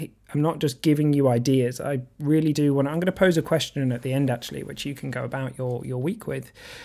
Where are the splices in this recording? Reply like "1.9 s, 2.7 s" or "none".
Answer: none